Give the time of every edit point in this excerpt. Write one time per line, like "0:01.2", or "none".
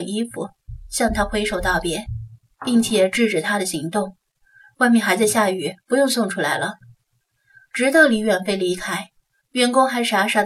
none